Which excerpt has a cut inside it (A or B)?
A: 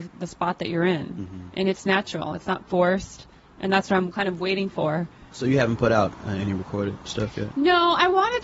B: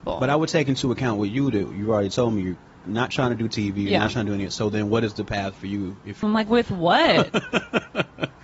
B